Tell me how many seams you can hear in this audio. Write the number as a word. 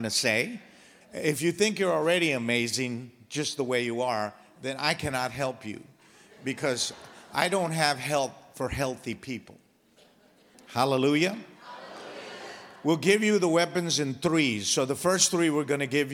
two